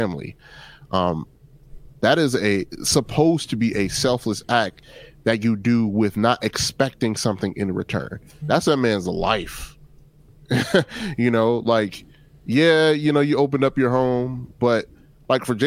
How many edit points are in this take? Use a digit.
1